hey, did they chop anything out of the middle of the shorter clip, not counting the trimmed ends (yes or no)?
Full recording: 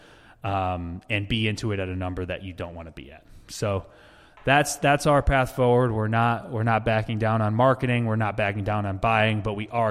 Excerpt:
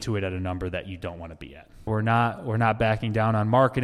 yes